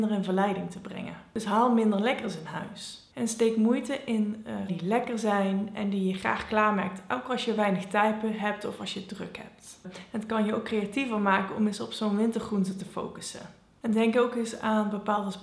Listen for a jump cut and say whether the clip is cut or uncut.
cut